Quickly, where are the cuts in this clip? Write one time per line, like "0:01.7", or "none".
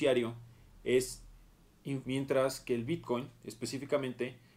0:02.0